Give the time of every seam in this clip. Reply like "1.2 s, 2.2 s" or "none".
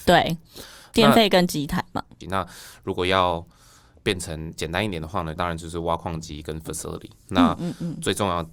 2.2 s, 5.4 s, 7.2 s